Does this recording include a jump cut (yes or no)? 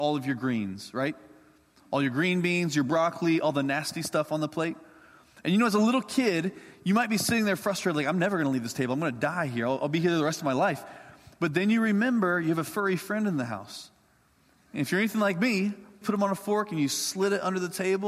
yes